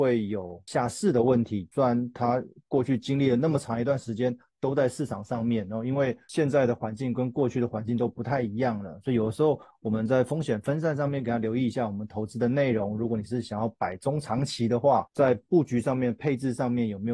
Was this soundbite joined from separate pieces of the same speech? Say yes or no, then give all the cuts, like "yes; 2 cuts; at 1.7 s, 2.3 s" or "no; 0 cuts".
no; 0 cuts